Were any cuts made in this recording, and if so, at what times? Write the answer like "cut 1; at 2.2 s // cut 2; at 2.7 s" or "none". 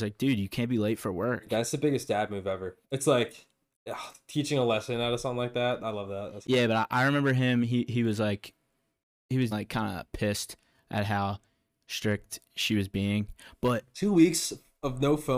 cut 1; at 2.8 s // cut 2; at 9.5 s